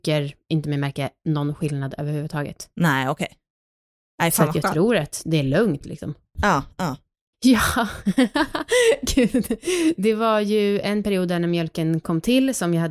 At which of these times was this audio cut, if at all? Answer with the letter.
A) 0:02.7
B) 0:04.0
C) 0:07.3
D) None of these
C